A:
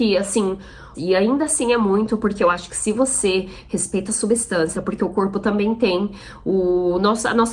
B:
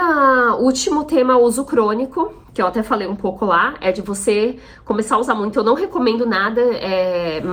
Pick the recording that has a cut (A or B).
A